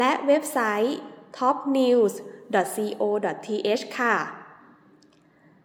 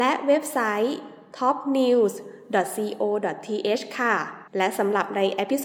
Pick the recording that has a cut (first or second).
second